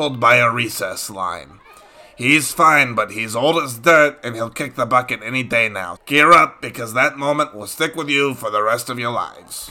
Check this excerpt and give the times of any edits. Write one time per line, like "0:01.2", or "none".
0:06.0